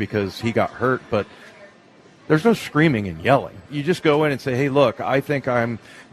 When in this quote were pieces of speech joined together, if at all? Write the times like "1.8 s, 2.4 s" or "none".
none

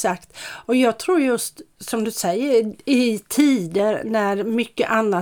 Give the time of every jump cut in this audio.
none

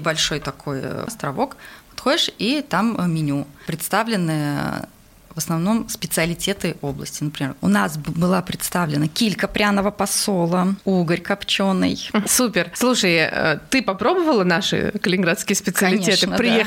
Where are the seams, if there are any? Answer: 12.2 s

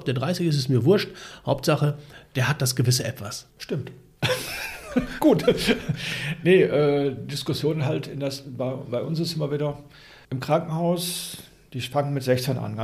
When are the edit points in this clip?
none

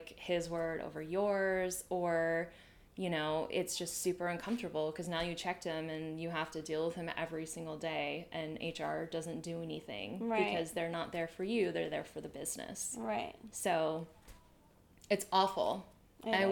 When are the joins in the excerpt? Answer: none

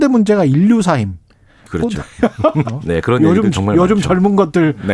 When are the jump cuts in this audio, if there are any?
2.6 s

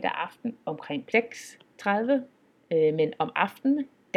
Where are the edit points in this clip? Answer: 1.1 s

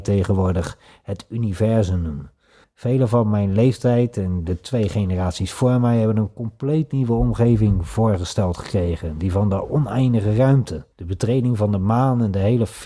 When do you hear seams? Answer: 2.6 s, 10.9 s

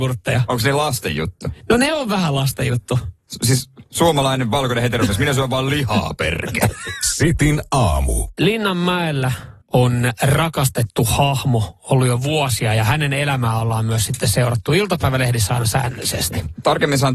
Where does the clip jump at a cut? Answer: 9.6 s

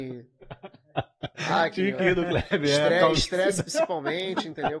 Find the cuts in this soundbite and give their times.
none

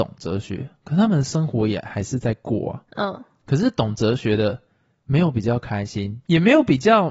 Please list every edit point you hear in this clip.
none

